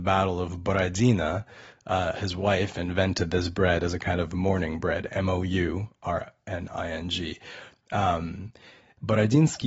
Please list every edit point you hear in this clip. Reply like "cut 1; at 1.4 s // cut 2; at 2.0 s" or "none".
cut 1; at 2.1 s